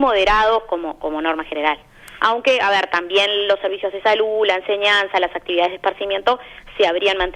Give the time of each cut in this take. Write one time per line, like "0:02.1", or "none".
0:02.2